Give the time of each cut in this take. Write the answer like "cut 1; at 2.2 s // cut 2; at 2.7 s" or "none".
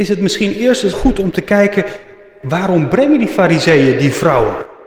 cut 1; at 0.9 s